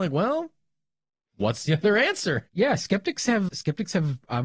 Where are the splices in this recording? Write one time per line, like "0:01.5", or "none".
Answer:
0:02.5
0:03.5